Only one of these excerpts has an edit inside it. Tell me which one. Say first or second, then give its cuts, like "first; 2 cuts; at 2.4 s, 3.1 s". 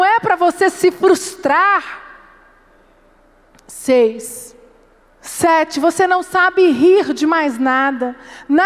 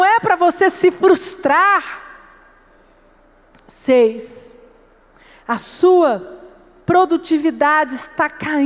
first; 1 cut; at 5.1 s